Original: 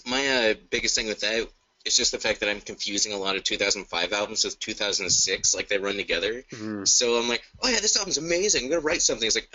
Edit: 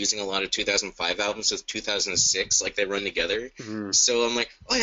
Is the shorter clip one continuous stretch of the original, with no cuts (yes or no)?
yes